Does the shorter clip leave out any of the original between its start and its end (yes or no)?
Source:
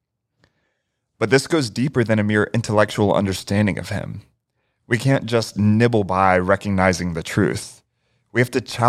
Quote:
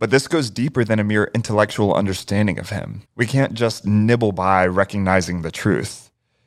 yes